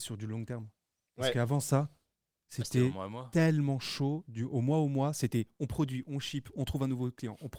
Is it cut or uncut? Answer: uncut